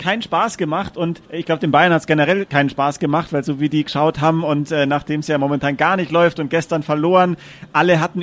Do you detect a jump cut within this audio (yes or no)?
yes